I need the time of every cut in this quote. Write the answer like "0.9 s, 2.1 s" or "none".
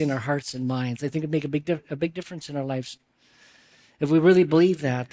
none